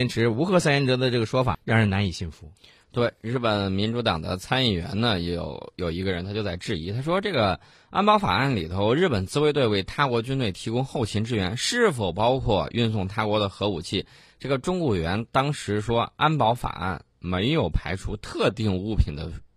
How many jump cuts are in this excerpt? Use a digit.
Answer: 1